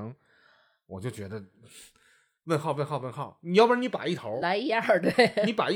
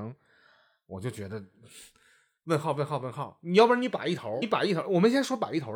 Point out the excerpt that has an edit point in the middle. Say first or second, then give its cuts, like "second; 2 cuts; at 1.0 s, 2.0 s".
second; 1 cut; at 4.4 s